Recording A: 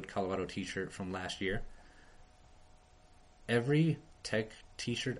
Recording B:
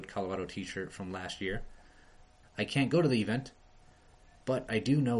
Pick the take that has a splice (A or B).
B